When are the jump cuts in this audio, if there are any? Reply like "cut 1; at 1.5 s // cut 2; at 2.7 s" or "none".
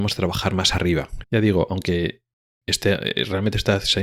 cut 1; at 1.2 s